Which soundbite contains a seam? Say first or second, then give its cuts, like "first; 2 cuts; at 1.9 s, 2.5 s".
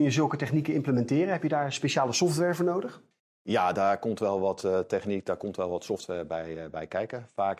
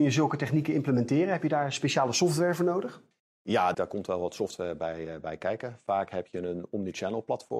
second; 1 cut; at 3.7 s